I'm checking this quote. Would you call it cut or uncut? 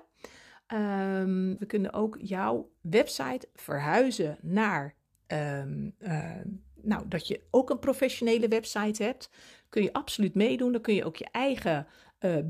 cut